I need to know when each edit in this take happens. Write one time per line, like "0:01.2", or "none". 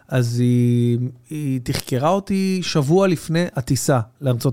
none